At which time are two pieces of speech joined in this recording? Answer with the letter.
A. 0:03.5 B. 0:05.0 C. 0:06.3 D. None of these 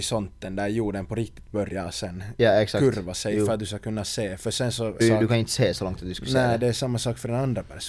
B